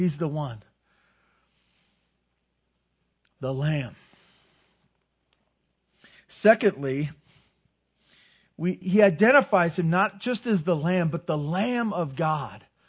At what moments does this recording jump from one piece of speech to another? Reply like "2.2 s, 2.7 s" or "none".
8.8 s